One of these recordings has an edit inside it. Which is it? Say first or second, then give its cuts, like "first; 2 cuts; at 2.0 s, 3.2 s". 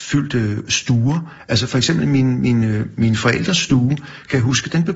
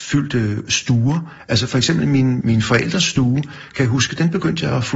second; 1 cut; at 2.4 s